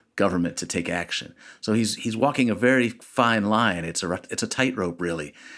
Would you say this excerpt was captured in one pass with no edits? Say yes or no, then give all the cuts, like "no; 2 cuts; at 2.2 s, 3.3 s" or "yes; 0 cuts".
yes; 0 cuts